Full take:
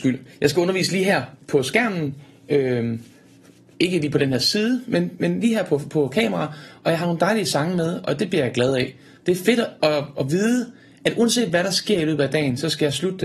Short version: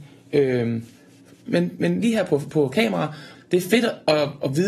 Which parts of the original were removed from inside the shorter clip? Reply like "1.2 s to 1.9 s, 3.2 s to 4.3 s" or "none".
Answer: 3.6 s to 4.9 s, 6.7 s to 9.1 s